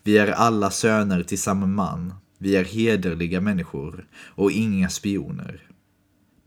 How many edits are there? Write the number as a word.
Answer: one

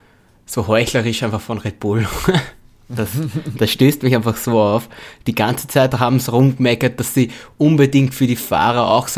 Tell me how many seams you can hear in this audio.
zero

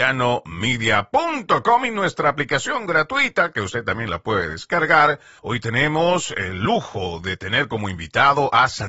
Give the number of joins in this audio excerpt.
one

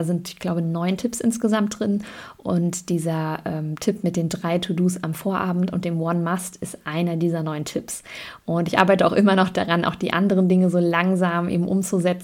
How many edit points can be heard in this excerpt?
zero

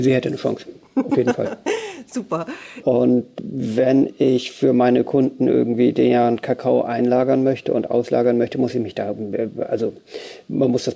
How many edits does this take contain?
one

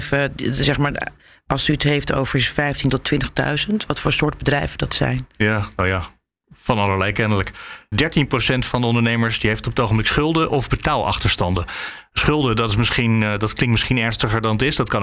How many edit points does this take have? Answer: one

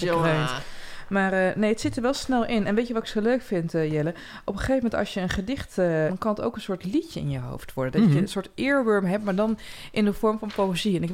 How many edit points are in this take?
one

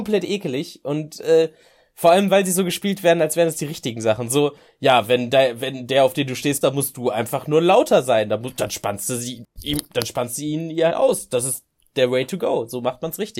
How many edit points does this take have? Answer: two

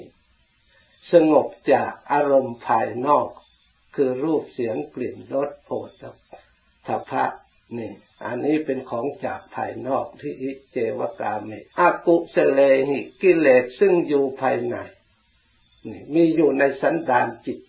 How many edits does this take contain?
two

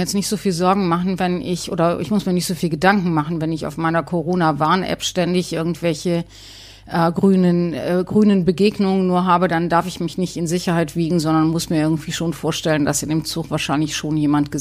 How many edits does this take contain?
zero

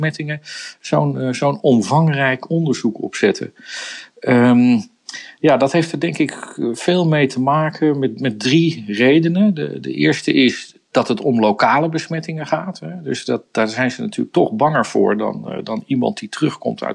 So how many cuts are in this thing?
zero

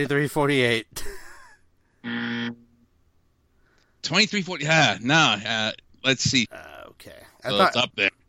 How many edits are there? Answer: one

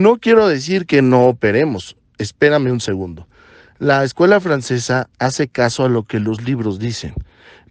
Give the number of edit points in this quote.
zero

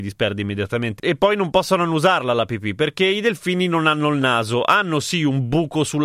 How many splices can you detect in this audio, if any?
one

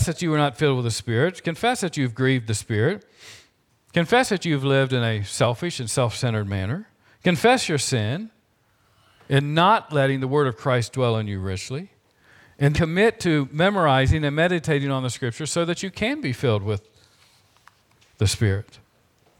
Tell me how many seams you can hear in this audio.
one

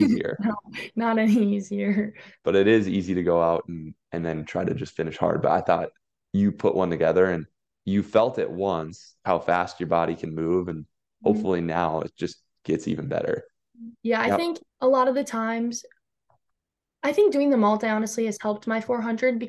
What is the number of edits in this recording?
one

